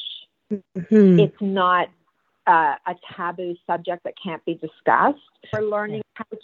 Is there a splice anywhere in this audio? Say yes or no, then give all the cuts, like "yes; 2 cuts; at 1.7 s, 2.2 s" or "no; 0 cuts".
yes; 1 cut; at 5.5 s